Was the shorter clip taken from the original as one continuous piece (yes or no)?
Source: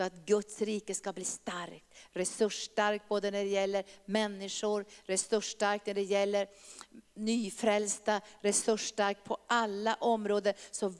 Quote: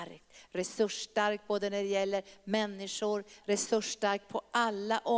no